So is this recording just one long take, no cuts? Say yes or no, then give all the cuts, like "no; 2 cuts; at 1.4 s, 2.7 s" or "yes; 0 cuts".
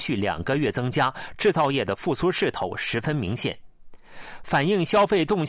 yes; 0 cuts